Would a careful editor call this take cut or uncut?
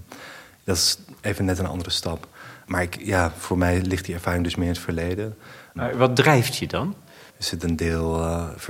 cut